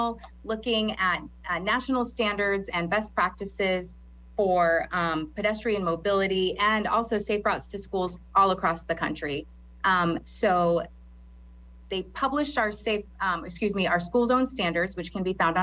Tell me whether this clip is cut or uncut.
uncut